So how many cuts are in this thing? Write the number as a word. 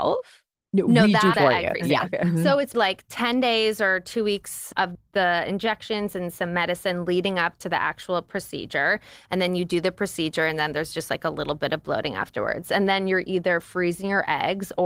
two